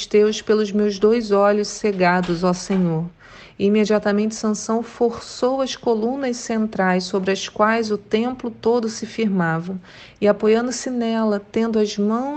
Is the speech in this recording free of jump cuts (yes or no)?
yes